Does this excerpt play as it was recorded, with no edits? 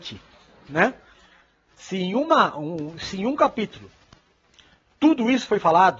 yes; 0 cuts

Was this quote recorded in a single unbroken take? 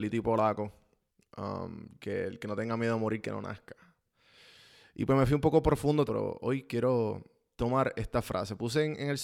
no; 1 cut; at 6.1 s

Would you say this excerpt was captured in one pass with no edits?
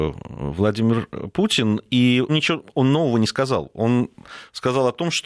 no; 1 cut; at 2.3 s

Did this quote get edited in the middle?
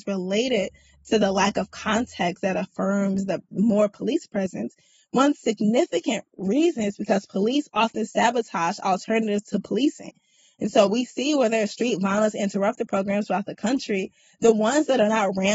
no; 0 cuts

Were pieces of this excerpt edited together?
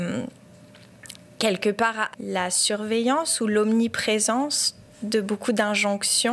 yes; 1 cut; at 2.1 s

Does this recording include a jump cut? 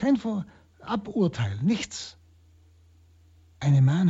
no; 0 cuts

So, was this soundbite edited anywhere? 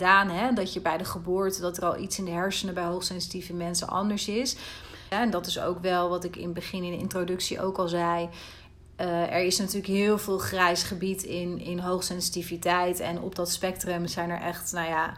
yes; 2 cuts; at 5.1 s, 14.1 s

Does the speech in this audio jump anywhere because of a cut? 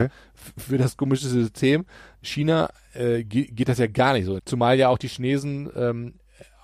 yes; 1 cut; at 4.4 s

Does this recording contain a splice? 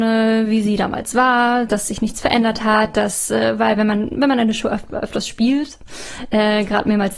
no; 0 cuts

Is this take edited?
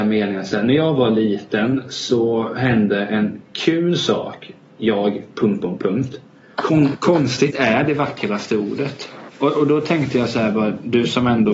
yes; 2 cuts; at 6.5 s, 9.3 s

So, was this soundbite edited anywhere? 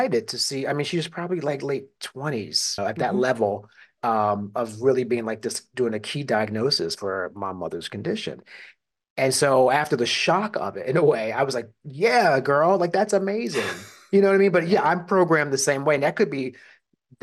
yes; 1 cut; at 2.8 s

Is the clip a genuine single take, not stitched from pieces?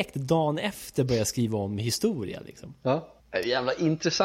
no; 1 cut; at 3.2 s

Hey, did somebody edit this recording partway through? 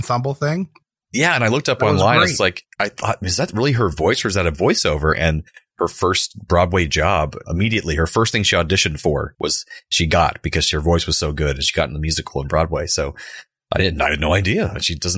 yes; 2 cuts; at 5.1 s, 7.4 s

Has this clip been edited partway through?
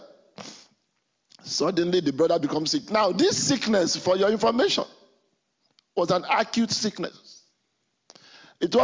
no; 0 cuts

